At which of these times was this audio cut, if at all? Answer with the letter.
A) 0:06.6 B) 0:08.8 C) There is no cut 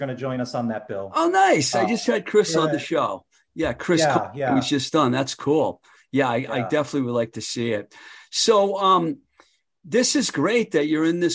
C